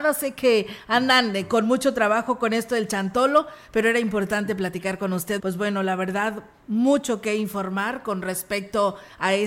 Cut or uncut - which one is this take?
cut